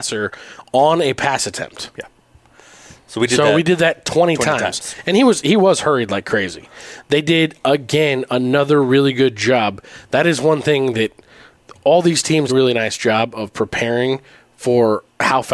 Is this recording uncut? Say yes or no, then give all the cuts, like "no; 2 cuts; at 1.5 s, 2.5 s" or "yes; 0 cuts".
no; 1 cut; at 12.5 s